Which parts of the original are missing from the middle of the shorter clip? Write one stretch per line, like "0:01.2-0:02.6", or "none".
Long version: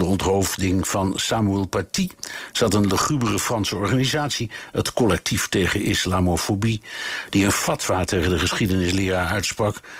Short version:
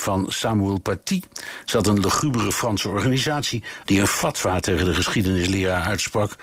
0:04.7-0:07.3